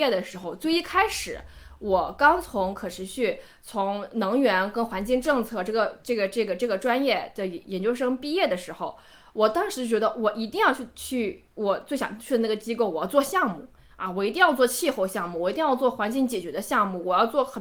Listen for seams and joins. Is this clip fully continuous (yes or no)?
yes